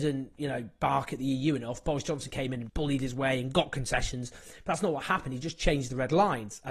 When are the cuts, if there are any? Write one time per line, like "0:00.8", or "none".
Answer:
0:02.7